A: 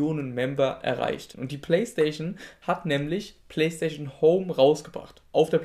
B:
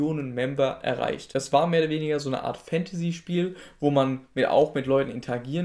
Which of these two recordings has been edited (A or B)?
A